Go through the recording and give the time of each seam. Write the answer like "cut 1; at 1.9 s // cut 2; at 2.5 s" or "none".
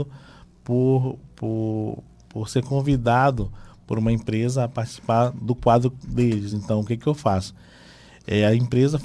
none